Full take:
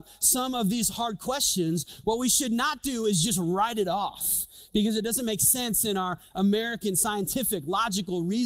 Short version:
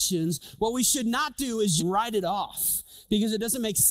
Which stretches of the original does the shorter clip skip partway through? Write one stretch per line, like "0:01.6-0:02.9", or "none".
0:03.2-0:03.4